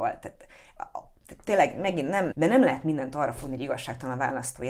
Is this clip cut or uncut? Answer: cut